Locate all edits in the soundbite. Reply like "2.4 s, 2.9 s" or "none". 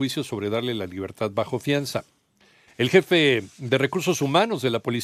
2.7 s